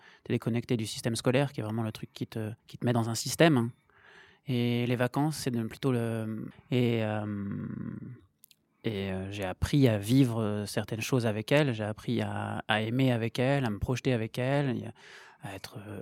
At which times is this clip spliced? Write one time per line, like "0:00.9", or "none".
0:02.6
0:06.5